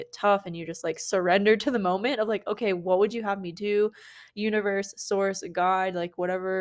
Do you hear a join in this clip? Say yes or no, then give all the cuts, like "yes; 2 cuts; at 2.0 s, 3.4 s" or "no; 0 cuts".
no; 0 cuts